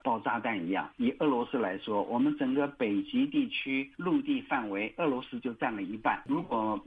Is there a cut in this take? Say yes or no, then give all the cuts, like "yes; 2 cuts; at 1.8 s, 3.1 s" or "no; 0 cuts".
no; 0 cuts